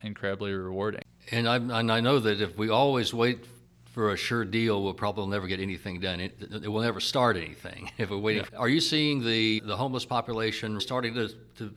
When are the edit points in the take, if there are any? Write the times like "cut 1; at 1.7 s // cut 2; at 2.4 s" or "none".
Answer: cut 1; at 8.5 s // cut 2; at 9.6 s // cut 3; at 10.8 s

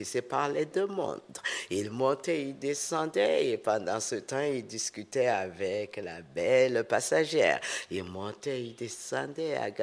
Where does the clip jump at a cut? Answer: none

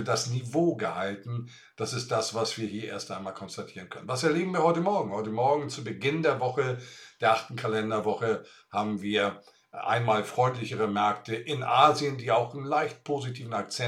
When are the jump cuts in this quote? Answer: none

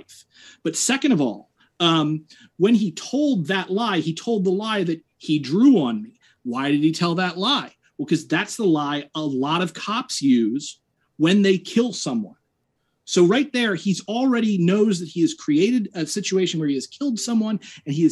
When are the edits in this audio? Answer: none

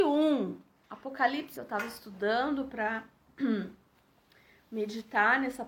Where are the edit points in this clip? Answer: cut 1; at 1.5 s

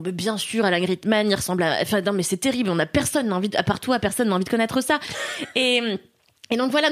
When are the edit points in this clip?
none

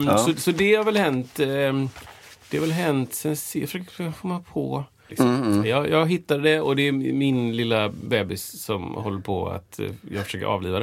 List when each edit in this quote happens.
cut 1; at 5.1 s

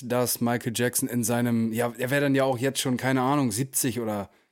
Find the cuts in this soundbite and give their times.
none

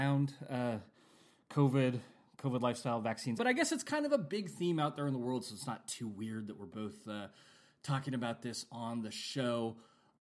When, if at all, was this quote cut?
cut 1; at 3.4 s

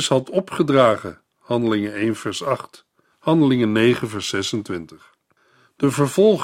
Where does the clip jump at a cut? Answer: cut 1; at 3.1 s

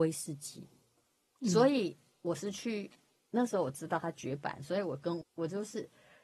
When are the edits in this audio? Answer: cut 1; at 5.2 s

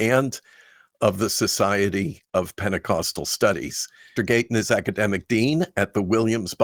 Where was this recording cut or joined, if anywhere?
cut 1; at 4.2 s

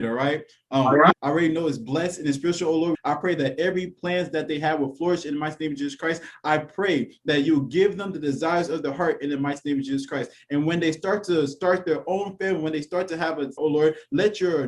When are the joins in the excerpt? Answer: cut 1; at 1.1 s // cut 2; at 2.9 s // cut 3; at 13.6 s

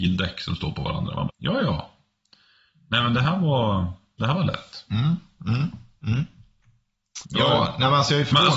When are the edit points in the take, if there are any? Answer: cut 1; at 1.3 s // cut 2; at 7.2 s

